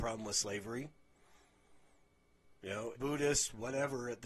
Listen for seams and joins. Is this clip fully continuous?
no; 1 cut; at 2.9 s

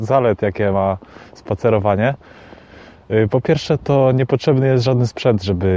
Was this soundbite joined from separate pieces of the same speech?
no; 0 cuts

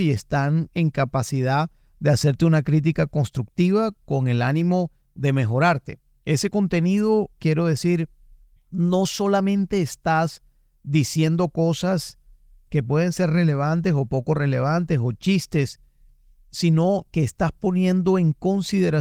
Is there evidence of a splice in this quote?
yes; 1 cut; at 6.2 s

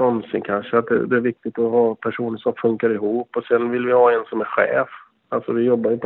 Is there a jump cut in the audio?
no; 0 cuts

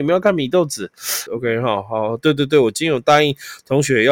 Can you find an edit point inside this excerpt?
yes; 1 cut; at 1.3 s

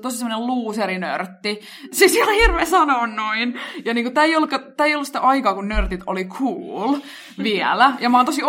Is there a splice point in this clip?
no; 0 cuts

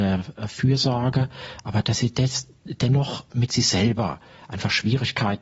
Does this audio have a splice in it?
no; 0 cuts

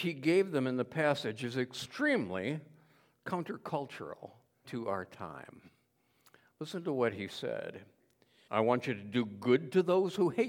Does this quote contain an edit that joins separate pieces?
yes; 2 cuts; at 4.6 s, 8.5 s

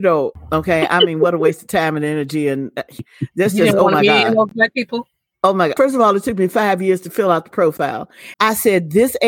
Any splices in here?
yes; 2 cuts; at 5.8 s, 8.3 s

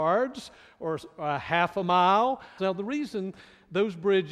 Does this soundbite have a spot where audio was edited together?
yes; 1 cut; at 2.6 s

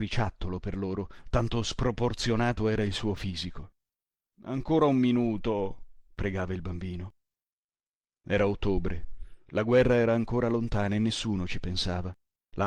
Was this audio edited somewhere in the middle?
no; 0 cuts

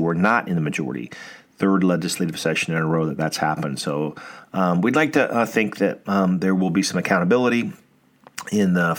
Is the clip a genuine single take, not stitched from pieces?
yes; 0 cuts

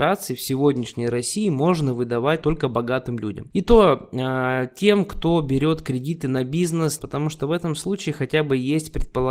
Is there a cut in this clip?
yes; 2 cuts; at 2.4 s, 7.0 s

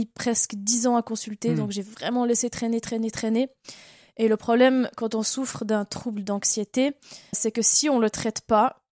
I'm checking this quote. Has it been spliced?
yes; 1 cut; at 7.3 s

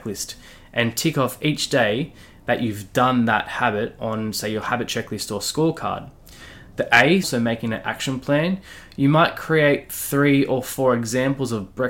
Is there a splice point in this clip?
yes; 1 cut; at 7.2 s

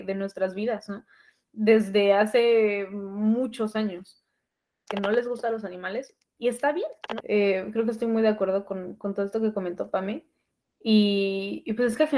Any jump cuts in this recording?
yes; 2 cuts; at 4.9 s, 7.2 s

